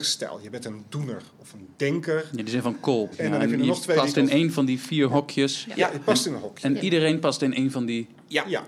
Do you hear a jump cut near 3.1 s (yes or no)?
yes